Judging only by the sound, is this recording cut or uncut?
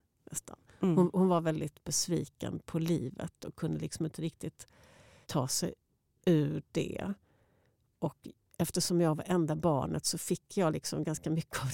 cut